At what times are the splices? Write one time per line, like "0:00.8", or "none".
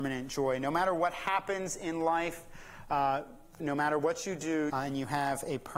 0:03.6
0:04.7